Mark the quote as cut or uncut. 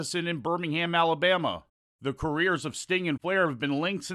cut